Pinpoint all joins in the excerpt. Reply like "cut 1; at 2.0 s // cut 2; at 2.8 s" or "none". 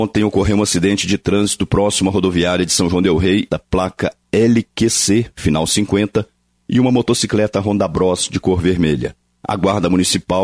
cut 1; at 3.5 s